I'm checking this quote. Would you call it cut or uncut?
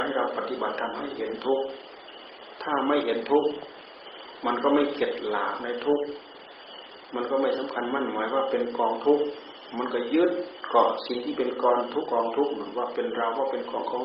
cut